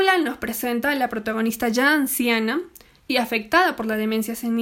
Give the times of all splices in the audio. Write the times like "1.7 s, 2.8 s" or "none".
none